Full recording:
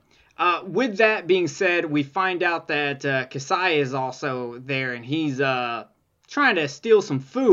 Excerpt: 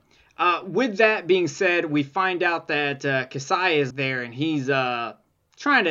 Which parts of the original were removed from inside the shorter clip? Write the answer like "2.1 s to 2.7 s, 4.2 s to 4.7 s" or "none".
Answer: 3.9 s to 4.6 s